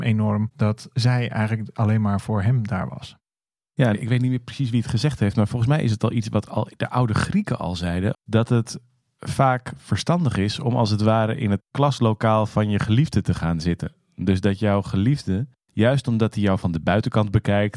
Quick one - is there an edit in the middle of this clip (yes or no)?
yes